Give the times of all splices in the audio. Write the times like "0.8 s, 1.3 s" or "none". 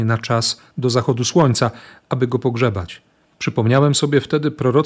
3.3 s